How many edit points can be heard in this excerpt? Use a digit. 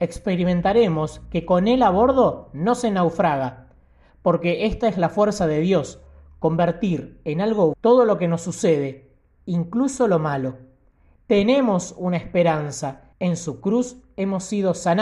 3